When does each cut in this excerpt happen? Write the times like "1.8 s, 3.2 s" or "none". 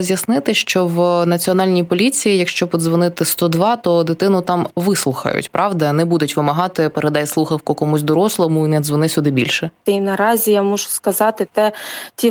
9.9 s

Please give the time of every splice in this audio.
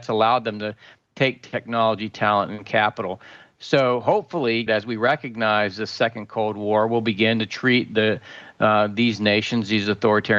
4.7 s

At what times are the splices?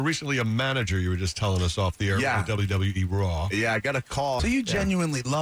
4.4 s

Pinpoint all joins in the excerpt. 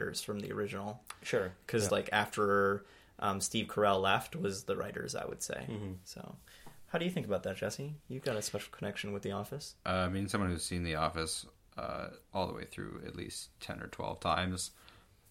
1.9 s

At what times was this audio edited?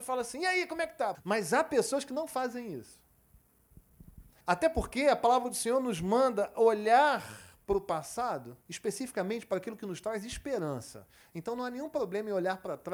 1.1 s, 4.4 s, 8.6 s

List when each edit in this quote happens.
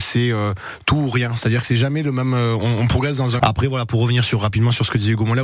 3.4 s

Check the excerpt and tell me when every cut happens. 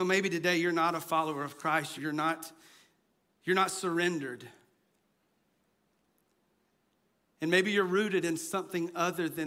2.0 s

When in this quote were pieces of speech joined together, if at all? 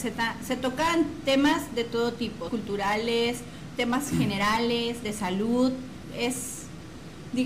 2.5 s, 3.8 s

